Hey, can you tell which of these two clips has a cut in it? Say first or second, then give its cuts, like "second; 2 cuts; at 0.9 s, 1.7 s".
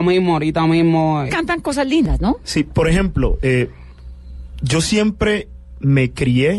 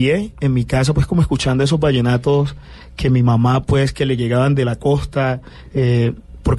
first; 2 cuts; at 1.3 s, 2.4 s